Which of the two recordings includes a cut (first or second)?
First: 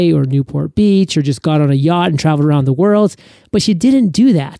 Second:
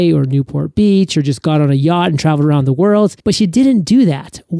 second